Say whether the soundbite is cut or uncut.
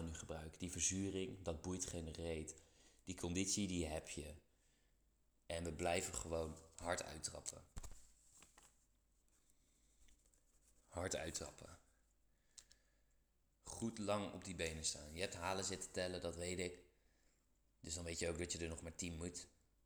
uncut